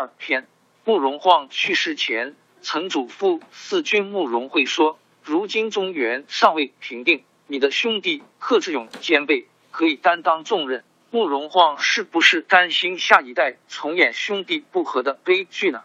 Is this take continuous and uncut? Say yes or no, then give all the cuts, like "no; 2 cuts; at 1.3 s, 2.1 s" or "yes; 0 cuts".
no; 1 cut; at 10.9 s